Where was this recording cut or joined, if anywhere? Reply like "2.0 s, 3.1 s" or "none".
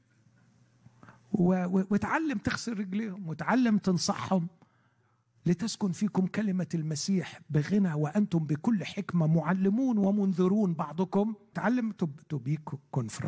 11.5 s